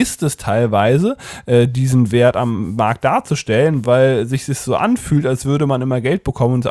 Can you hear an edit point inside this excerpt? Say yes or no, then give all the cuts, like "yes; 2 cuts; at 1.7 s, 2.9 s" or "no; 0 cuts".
no; 0 cuts